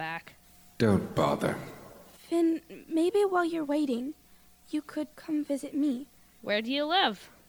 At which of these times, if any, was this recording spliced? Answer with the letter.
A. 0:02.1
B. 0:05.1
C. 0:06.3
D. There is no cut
B